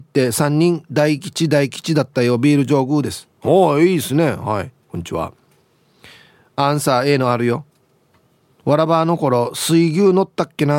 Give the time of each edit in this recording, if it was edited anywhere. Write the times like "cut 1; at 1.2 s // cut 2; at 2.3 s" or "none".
cut 1; at 1.7 s

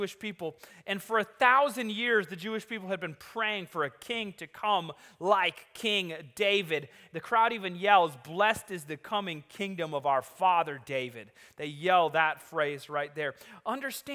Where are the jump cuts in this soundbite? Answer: none

